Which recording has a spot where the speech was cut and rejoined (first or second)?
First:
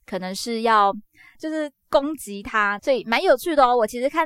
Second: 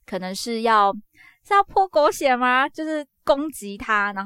first